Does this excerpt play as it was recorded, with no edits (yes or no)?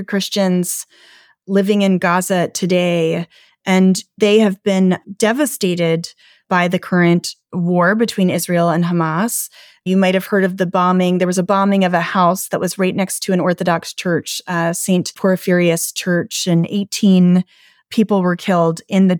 yes